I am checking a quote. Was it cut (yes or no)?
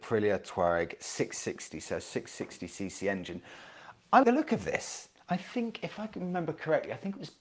yes